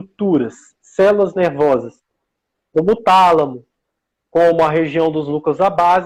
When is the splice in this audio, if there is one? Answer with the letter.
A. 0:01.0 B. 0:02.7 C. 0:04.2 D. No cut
D